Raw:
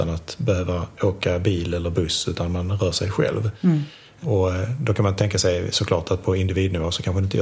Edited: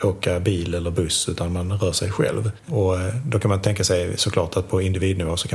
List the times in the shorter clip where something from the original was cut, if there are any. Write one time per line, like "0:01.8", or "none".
0:02.6